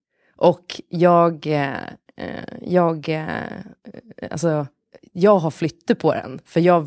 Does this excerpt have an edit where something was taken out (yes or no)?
no